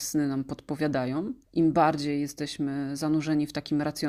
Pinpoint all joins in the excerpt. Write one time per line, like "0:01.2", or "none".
0:01.4